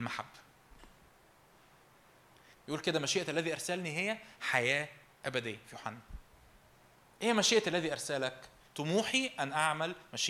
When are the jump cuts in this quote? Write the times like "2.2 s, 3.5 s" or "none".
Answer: 2.5 s, 8.6 s